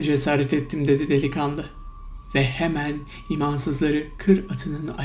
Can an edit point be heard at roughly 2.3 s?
no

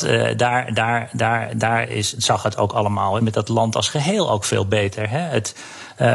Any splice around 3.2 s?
yes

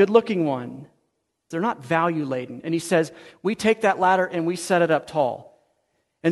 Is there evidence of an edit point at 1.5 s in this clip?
yes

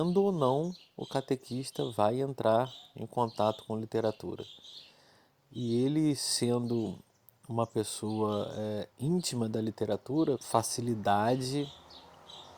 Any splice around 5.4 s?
no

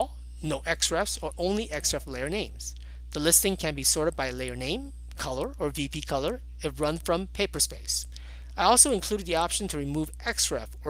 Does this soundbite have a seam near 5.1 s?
no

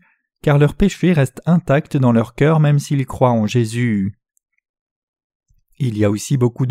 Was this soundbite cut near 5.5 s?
no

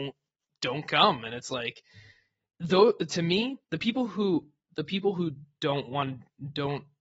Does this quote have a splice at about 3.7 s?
yes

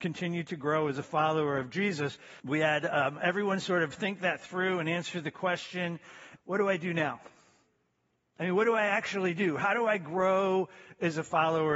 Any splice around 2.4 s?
yes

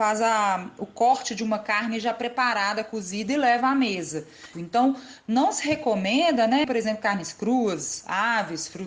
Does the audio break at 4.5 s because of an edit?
yes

